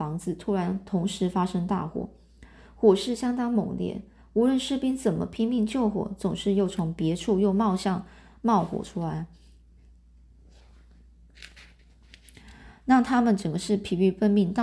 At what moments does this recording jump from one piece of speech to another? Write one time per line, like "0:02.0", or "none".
none